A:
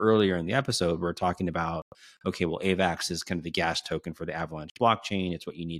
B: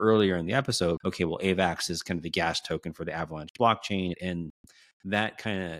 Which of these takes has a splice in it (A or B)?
B